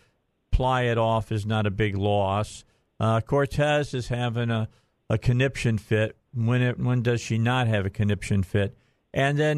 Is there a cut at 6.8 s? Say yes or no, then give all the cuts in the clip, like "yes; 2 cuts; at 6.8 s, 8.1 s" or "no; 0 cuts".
yes; 1 cut; at 6.8 s